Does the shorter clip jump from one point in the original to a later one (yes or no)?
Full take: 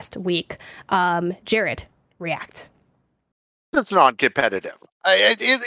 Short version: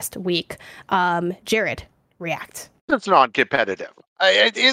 yes